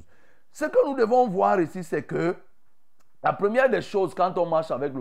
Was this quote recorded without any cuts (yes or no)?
yes